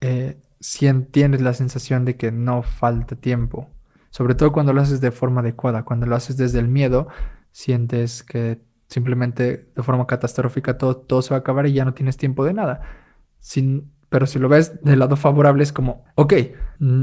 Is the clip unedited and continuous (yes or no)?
yes